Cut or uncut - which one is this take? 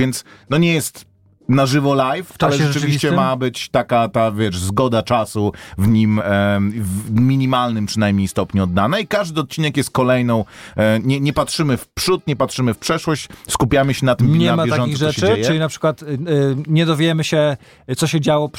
uncut